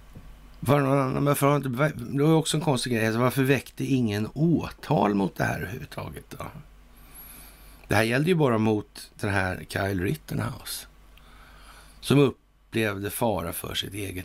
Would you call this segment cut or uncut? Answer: uncut